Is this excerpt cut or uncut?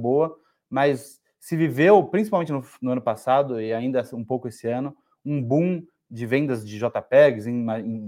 uncut